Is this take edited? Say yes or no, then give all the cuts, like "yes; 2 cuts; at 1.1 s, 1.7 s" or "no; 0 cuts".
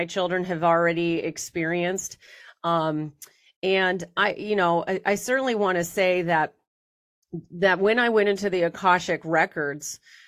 no; 0 cuts